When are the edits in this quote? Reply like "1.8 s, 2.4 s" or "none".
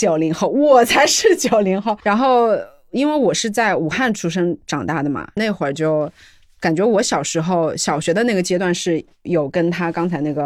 none